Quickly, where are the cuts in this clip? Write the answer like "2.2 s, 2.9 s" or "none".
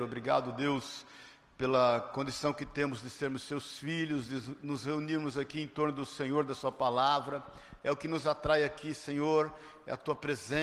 none